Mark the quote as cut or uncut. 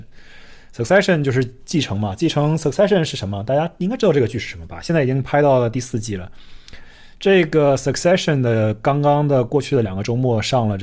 uncut